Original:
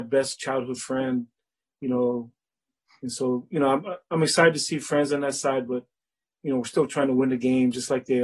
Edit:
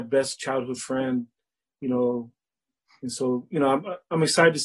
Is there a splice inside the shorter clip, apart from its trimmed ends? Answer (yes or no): no